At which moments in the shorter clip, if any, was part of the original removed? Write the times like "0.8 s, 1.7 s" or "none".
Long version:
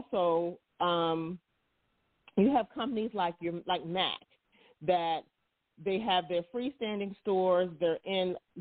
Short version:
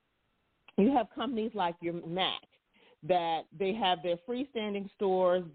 2.0 s, 3.5 s